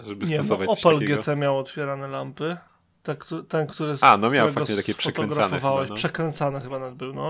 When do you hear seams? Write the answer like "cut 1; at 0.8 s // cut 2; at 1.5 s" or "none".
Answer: none